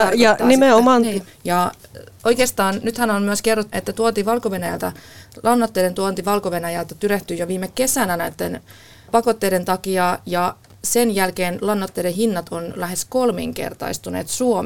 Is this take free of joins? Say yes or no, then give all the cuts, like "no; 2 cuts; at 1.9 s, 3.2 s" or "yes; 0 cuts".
no; 2 cuts; at 1.3 s, 3.7 s